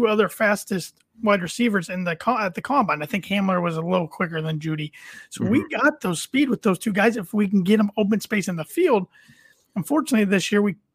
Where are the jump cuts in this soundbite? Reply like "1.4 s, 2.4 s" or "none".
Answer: none